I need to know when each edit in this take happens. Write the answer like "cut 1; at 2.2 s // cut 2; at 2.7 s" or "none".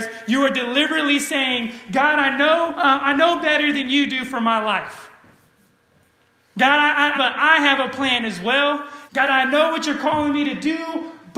cut 1; at 2.7 s // cut 2; at 7.2 s // cut 3; at 9.1 s